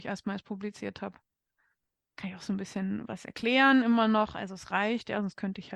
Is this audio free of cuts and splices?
yes; 0 cuts

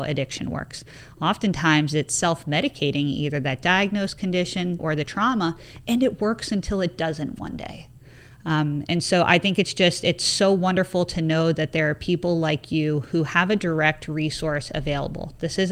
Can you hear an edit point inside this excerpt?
yes; 1 cut; at 4.8 s

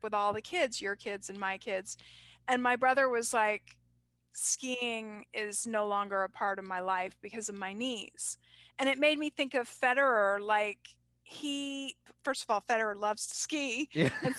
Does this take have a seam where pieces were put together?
no; 0 cuts

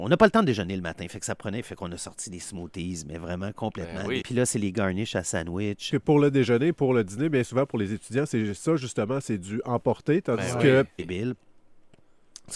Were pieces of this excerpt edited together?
yes; 3 cuts; at 4.2 s, 5.9 s, 11.0 s

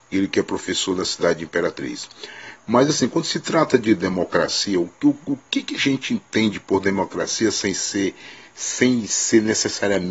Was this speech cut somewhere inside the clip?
no; 0 cuts

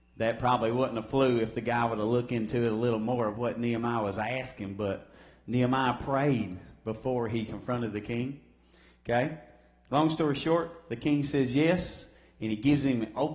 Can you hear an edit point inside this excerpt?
no; 0 cuts

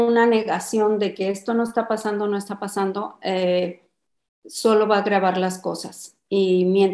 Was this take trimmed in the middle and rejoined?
no; 0 cuts

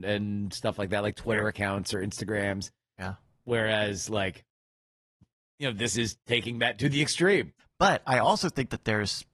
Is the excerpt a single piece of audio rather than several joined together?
no; 1 cut; at 7.6 s

